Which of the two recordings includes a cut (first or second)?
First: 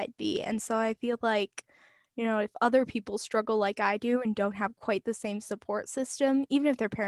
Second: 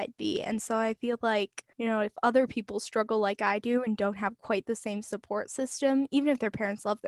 second